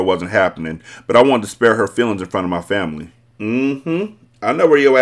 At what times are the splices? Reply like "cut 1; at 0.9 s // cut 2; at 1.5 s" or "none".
cut 1; at 3.3 s